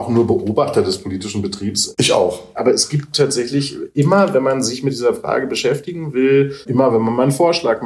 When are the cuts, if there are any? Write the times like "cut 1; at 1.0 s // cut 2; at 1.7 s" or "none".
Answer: none